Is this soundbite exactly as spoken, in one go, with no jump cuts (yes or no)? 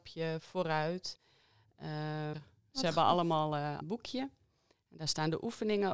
no